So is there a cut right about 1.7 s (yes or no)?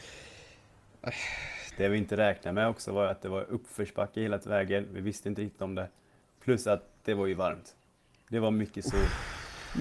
yes